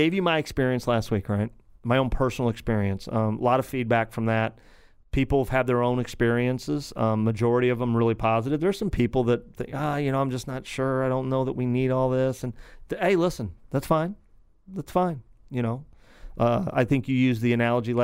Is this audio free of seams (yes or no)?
yes